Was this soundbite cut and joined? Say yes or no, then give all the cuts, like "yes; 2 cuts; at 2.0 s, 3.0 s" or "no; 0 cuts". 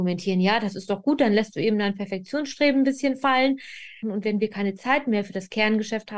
yes; 1 cut; at 4.0 s